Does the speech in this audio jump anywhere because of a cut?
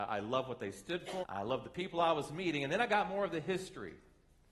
yes; 1 cut; at 1.2 s

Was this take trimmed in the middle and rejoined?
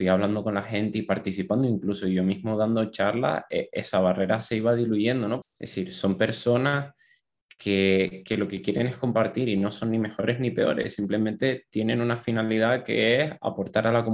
yes; 1 cut; at 5.4 s

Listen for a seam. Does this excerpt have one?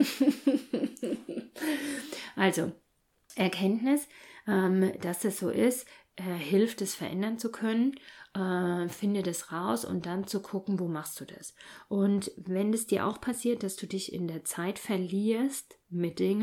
no; 0 cuts

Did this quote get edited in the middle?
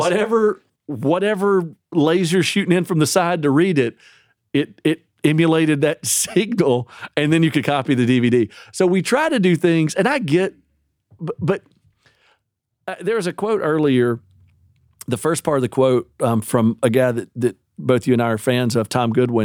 no; 0 cuts

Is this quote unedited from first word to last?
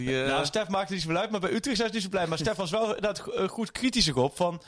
yes; 0 cuts

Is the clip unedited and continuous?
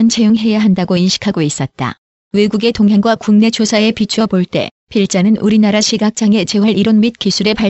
no; 1 cut; at 2.3 s

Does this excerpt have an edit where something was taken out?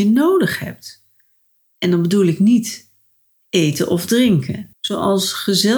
yes; 1 cut; at 4.7 s

